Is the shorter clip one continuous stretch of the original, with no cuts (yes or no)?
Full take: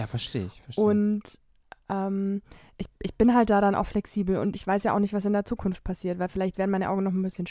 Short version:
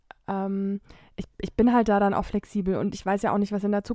yes